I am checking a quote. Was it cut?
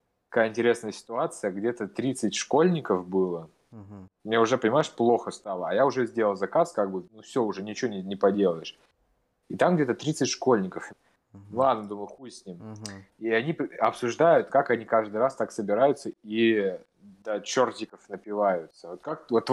yes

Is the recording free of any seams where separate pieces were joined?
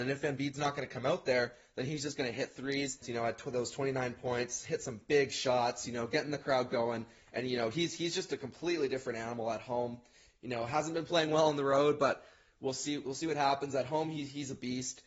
no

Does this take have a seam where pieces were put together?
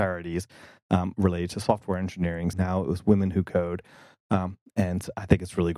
yes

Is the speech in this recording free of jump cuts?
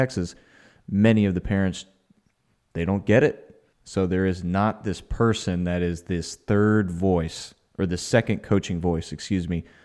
no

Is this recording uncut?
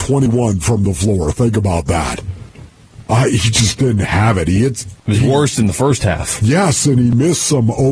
yes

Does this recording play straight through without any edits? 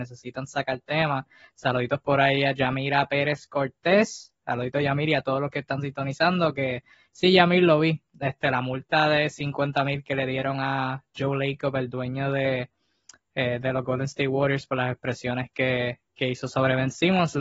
yes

